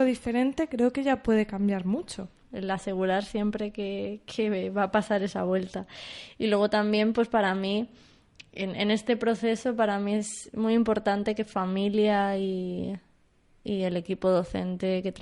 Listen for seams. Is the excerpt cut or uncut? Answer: cut